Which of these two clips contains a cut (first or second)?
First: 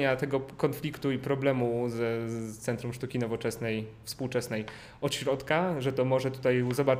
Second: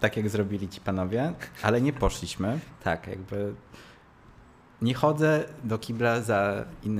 second